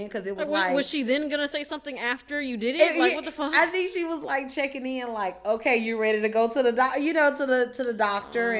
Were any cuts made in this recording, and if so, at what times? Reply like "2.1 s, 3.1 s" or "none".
none